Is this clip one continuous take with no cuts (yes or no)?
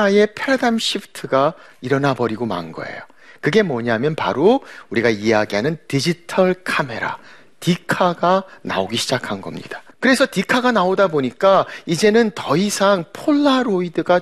no